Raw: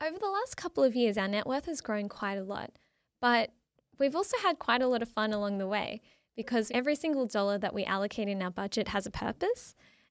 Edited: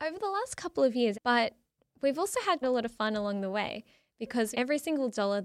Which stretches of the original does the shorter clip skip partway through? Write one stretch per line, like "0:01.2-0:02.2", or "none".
0:01.1-0:03.1
0:04.6-0:04.8